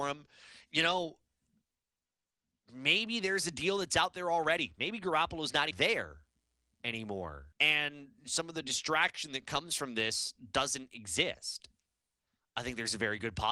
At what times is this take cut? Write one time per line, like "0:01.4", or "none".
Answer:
0:05.7
0:07.5